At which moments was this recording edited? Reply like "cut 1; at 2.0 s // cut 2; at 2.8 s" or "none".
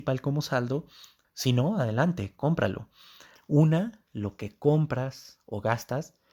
cut 1; at 1.2 s // cut 2; at 3.4 s